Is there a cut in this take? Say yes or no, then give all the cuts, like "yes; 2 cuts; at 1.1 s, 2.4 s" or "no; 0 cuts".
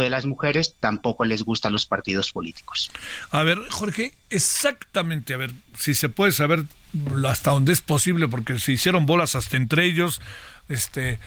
no; 0 cuts